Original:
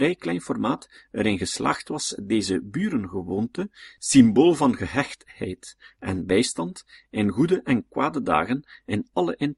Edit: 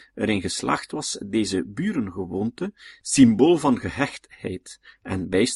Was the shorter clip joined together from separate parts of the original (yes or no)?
no